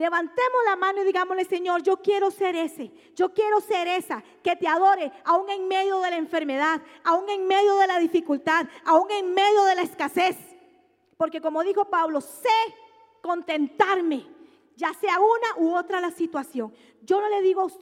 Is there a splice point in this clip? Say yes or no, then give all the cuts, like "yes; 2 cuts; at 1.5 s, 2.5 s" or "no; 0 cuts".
no; 0 cuts